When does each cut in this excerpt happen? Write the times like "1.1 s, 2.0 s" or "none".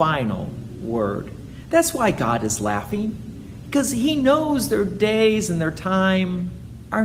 none